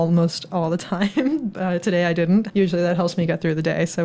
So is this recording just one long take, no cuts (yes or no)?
no